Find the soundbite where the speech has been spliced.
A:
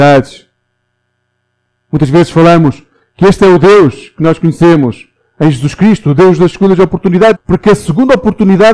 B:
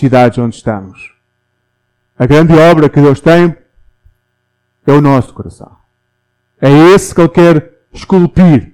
A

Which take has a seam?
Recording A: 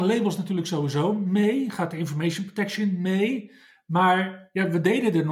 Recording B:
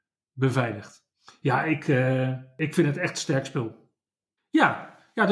B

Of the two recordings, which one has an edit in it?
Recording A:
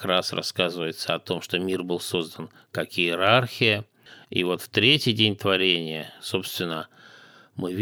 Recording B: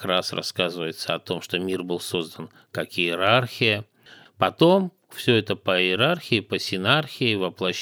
B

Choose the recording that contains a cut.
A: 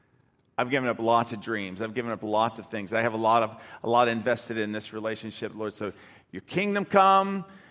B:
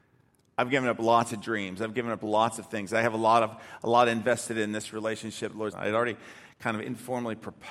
B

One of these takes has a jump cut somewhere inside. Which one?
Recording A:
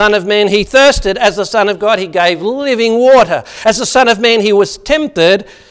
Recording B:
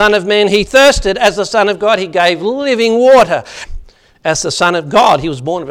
B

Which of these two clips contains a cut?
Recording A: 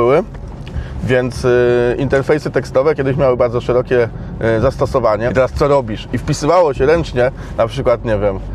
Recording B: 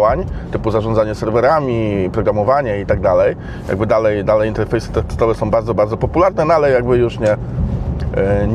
A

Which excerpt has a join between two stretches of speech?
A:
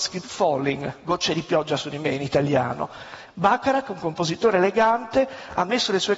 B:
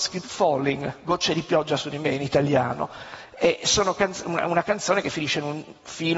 A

